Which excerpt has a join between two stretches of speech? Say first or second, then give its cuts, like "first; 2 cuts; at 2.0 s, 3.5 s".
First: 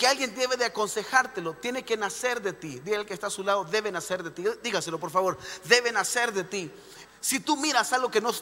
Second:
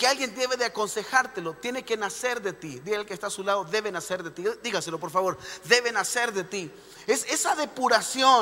first; 1 cut; at 7.0 s